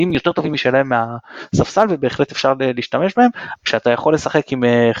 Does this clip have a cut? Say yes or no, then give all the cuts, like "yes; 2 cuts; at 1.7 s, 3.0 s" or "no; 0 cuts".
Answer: yes; 1 cut; at 3.6 s